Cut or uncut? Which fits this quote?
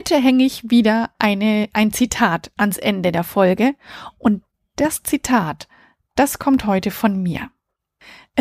uncut